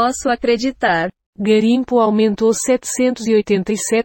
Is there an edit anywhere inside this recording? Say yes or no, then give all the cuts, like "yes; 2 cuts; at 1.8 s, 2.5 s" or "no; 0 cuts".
yes; 1 cut; at 1.3 s